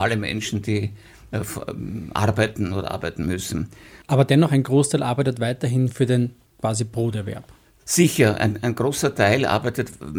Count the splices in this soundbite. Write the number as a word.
one